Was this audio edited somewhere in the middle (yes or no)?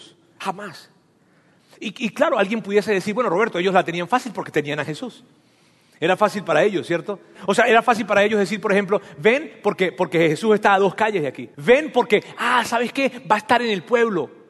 yes